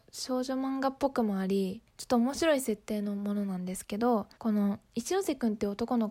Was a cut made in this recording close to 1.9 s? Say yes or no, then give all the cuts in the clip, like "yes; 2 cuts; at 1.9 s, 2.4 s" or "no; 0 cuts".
yes; 2 cuts; at 1.9 s, 4.3 s